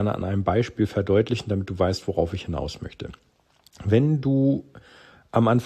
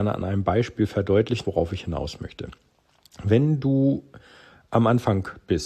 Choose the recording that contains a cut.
second; 1 cut; at 1.4 s

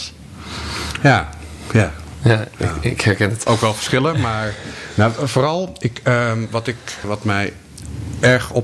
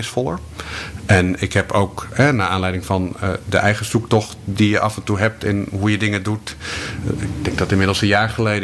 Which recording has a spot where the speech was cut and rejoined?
first; 1 cut; at 7.0 s

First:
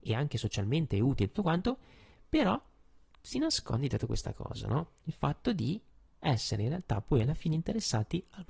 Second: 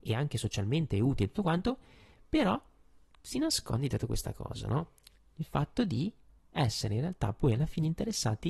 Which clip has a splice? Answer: first; 1 cut; at 5.0 s

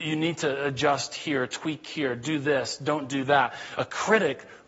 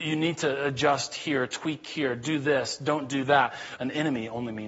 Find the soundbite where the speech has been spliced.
second; 1 cut; at 3.8 s

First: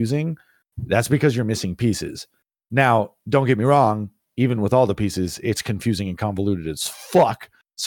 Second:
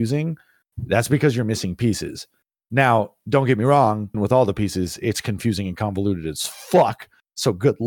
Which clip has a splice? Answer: second; 1 cut; at 4.1 s

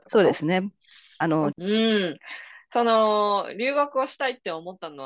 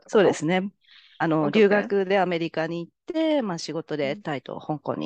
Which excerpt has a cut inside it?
first; 1 cut; at 1.5 s

